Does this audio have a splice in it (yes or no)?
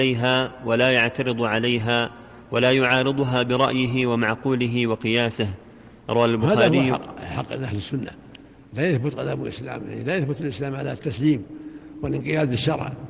no